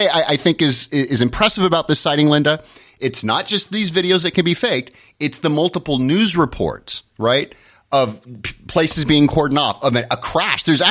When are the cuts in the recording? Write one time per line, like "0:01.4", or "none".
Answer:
none

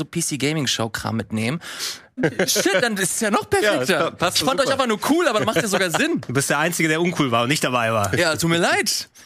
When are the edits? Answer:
0:02.2

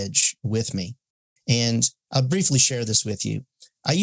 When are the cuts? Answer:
none

